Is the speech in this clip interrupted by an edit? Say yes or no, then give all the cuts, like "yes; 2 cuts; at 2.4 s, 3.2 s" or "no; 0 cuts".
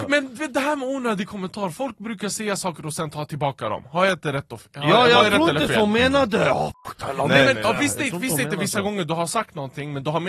no; 0 cuts